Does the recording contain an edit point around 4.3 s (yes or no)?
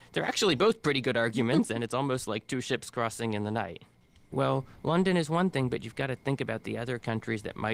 yes